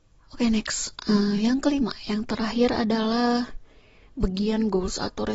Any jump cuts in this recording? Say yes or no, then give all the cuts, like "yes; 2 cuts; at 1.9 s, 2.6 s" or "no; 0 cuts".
no; 0 cuts